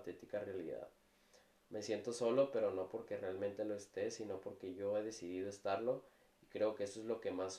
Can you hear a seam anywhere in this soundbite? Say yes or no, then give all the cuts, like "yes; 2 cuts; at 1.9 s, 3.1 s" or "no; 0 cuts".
no; 0 cuts